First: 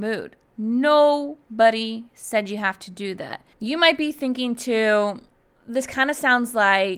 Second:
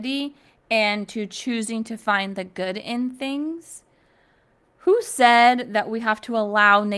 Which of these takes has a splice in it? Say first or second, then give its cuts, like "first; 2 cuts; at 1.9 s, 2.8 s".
first; 2 cuts; at 3.5 s, 5.6 s